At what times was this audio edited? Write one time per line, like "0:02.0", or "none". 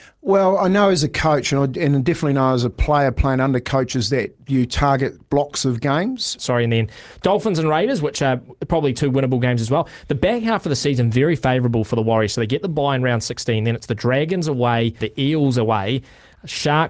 0:06.4
0:15.0